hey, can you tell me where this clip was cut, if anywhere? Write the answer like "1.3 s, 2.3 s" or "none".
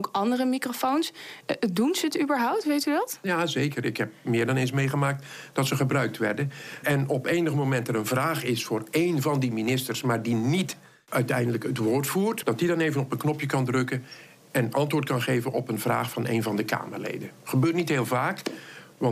6.8 s, 12.4 s